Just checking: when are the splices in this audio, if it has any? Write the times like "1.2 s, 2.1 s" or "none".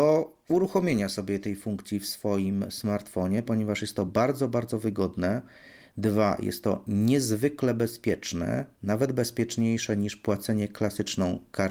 none